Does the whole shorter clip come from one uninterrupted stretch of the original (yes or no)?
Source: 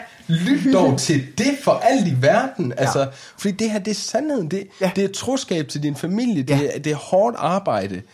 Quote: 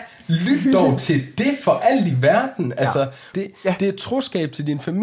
no